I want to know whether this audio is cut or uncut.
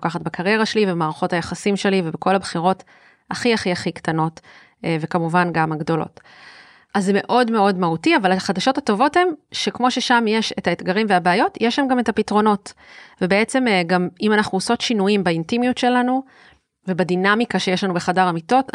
uncut